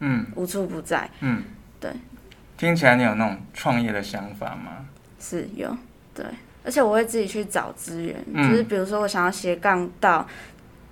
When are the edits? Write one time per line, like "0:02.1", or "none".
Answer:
0:06.1